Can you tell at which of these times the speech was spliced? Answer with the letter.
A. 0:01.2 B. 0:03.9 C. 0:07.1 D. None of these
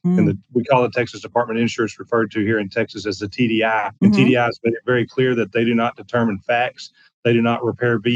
B